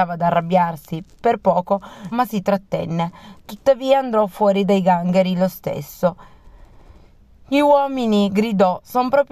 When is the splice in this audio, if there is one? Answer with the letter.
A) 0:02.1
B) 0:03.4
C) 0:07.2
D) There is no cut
A